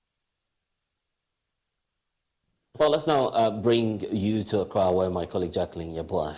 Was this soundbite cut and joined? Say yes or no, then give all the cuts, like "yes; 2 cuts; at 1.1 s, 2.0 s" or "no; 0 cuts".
no; 0 cuts